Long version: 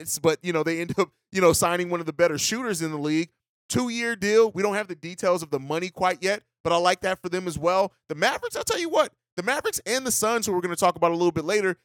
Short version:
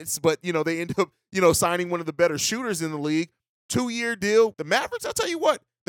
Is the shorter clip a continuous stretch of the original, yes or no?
no